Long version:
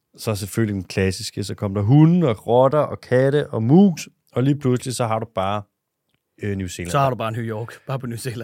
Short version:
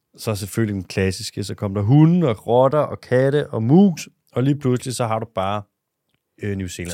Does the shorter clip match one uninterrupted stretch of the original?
yes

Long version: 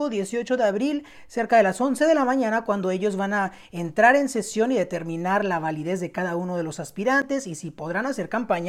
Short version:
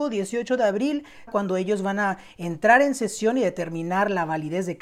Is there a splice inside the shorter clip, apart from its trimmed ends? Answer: yes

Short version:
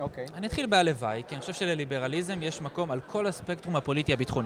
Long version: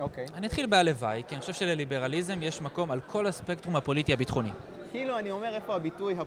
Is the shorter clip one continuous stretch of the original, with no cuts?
yes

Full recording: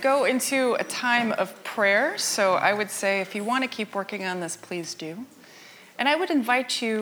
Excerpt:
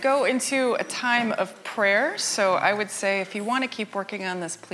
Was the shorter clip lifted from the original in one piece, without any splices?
yes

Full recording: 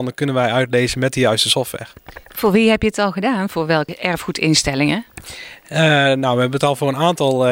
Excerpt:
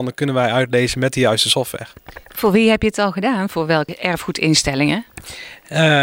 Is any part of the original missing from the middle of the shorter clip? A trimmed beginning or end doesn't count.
no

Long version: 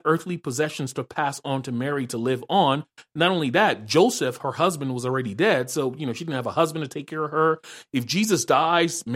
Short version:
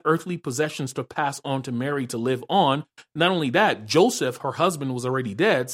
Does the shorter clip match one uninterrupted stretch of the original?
yes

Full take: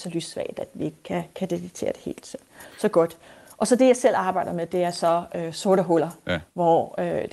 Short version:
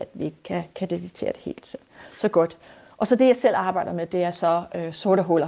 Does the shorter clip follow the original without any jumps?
yes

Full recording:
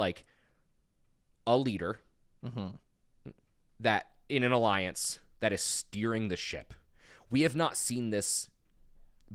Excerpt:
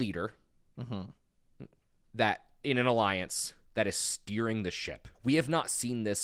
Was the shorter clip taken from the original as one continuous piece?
no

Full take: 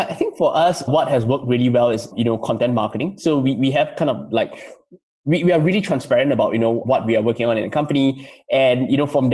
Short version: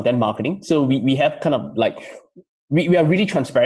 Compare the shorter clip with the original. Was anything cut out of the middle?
no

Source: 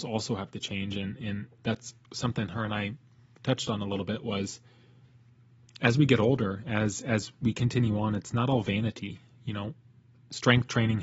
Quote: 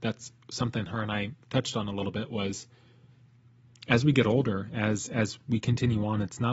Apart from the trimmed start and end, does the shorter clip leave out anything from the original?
yes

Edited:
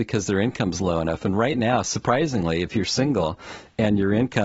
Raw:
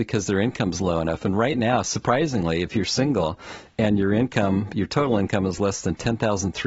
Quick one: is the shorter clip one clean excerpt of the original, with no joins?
yes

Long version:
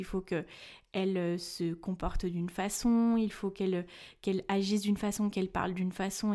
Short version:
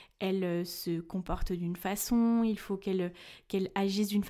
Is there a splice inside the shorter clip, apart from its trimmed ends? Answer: no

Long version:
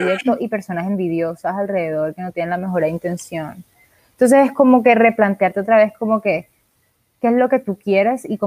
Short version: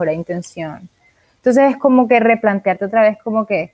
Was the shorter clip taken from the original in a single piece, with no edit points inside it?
yes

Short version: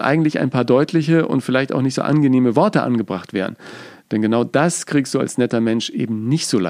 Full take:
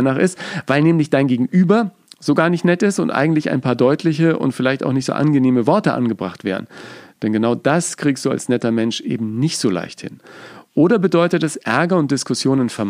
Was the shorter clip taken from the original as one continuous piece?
yes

